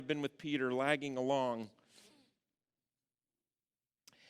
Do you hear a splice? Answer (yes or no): no